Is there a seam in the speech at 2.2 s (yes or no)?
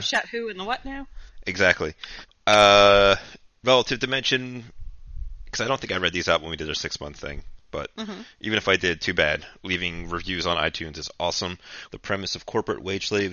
yes